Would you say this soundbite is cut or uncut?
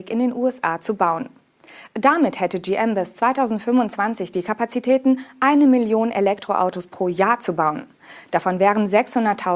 uncut